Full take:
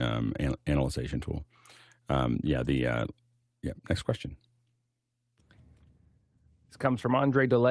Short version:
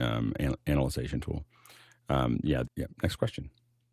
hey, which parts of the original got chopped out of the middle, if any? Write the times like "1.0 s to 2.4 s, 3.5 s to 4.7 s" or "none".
2.6 s to 3.5 s